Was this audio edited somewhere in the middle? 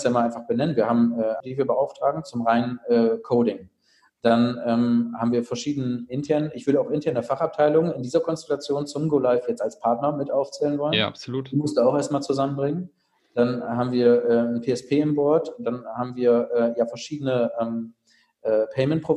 yes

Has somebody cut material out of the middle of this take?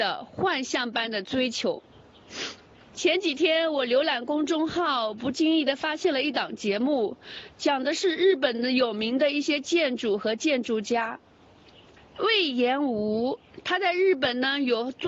yes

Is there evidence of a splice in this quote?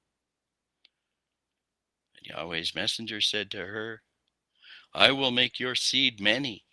yes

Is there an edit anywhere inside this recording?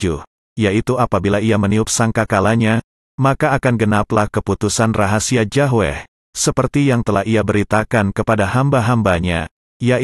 no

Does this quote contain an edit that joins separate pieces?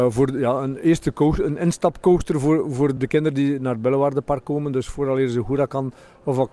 yes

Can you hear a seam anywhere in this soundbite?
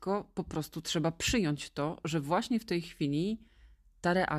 no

